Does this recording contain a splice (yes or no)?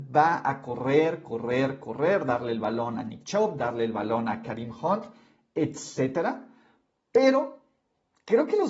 no